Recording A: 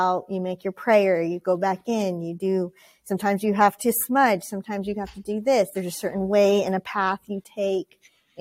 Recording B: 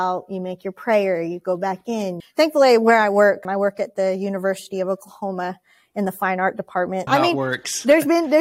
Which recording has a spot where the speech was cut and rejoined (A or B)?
B